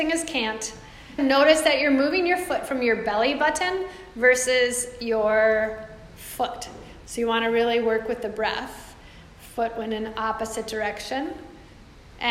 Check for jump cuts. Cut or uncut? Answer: cut